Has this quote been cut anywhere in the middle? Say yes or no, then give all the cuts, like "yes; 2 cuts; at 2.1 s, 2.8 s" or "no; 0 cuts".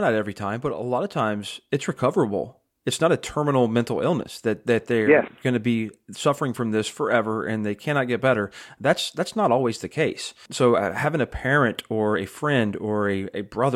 no; 0 cuts